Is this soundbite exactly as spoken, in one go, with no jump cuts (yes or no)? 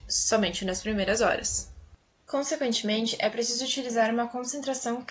yes